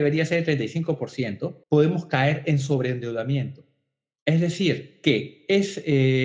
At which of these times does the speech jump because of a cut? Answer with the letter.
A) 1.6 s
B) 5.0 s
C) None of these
A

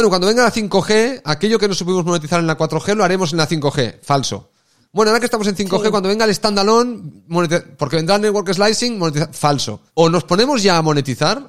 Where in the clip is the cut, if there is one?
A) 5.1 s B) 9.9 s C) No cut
B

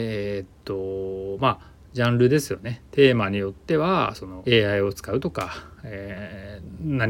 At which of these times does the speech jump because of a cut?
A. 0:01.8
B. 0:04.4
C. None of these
B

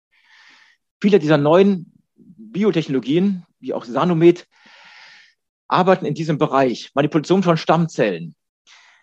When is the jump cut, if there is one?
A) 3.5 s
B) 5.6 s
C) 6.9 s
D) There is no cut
A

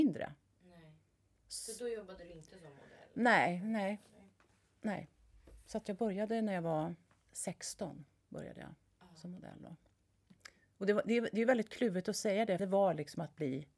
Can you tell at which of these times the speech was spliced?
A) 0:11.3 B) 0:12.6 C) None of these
B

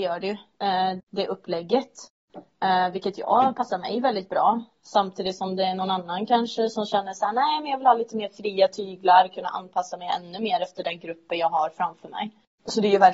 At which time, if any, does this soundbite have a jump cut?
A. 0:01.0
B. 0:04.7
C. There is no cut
A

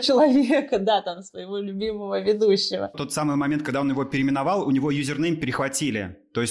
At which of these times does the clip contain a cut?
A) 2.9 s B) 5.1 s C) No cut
A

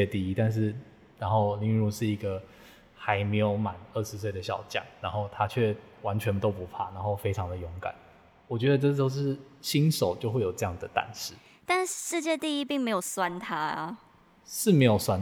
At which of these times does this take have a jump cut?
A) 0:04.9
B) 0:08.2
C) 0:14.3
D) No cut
D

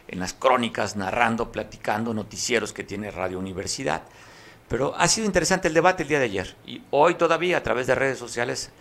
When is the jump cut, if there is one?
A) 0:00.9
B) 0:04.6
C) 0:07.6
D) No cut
D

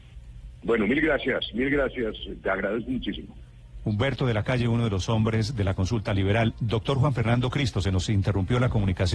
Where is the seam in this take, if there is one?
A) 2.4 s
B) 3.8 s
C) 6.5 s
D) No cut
D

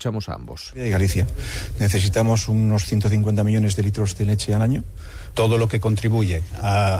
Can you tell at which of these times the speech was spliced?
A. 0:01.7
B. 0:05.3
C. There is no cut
B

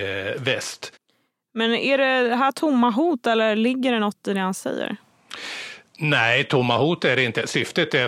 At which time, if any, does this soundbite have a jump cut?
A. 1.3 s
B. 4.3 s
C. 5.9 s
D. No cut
D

